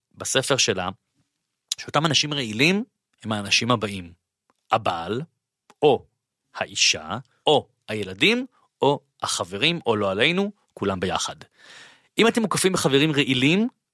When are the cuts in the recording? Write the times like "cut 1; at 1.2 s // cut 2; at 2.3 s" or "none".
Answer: cut 1; at 7.4 s